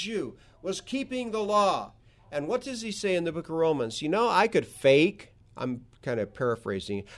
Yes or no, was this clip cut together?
no